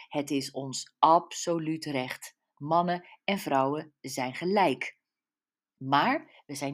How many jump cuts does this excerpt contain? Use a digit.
0